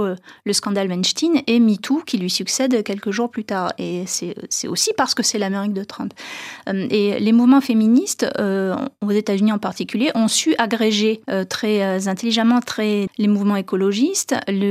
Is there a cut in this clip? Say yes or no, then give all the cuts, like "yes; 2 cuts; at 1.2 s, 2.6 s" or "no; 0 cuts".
yes; 2 cuts; at 11.2 s, 13.1 s